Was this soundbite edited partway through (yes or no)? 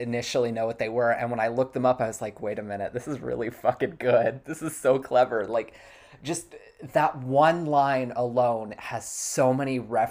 no